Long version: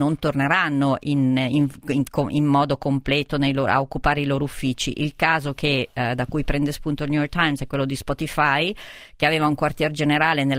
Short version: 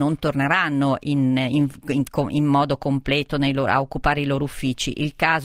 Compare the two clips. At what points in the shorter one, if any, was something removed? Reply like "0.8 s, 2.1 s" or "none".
none